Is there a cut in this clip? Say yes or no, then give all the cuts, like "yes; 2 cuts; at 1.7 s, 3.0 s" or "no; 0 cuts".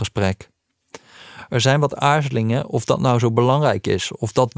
no; 0 cuts